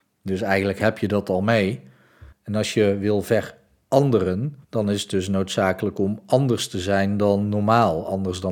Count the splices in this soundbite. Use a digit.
2